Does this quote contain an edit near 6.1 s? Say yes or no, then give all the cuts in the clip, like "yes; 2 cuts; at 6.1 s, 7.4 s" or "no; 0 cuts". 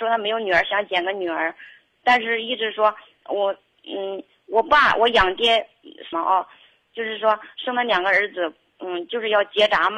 yes; 1 cut; at 6.1 s